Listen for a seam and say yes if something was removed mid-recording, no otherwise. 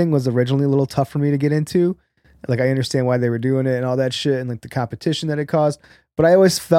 no